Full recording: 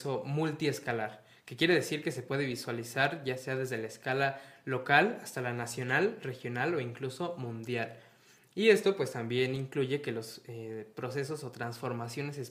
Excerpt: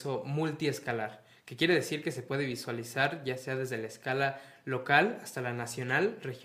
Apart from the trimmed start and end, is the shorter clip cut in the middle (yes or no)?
no